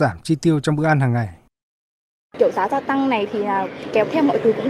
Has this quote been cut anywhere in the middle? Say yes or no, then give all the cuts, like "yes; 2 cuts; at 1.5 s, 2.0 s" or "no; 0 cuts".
no; 0 cuts